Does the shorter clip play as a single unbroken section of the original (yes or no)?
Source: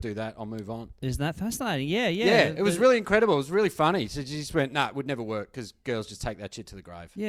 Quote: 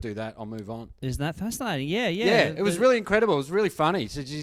yes